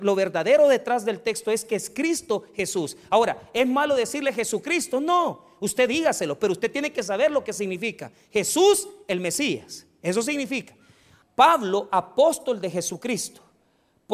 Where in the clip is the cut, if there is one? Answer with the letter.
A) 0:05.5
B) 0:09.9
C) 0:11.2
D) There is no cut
C